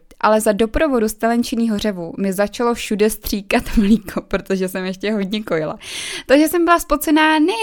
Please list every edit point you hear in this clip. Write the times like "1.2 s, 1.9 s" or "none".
none